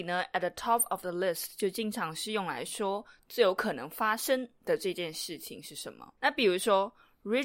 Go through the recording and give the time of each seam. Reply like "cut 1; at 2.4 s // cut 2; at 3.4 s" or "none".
cut 1; at 6.2 s